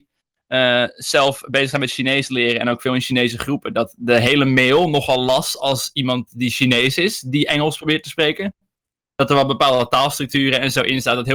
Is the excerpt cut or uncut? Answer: uncut